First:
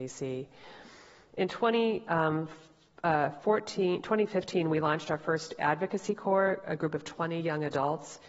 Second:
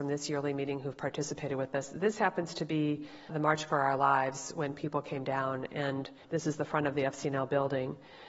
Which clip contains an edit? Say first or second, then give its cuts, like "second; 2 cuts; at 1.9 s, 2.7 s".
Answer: second; 2 cuts; at 3.3 s, 6.2 s